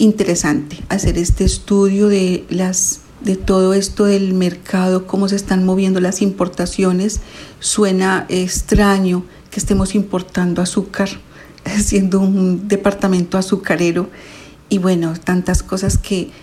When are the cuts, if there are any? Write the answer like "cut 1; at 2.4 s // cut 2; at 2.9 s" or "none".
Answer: cut 1; at 3.1 s